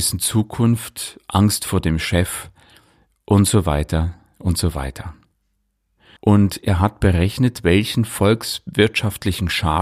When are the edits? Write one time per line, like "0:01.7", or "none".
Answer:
0:06.2